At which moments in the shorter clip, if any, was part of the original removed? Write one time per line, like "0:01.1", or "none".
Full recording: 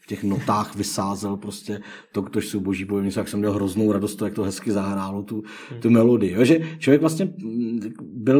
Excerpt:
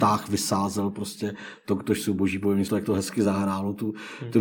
0:02.7